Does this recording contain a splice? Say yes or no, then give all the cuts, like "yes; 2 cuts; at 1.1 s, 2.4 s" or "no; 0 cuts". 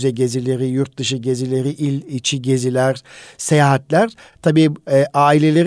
no; 0 cuts